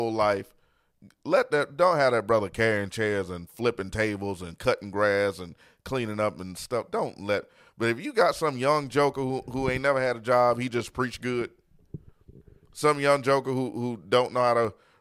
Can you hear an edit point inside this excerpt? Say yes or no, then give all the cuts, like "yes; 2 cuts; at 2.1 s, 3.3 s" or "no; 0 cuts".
no; 0 cuts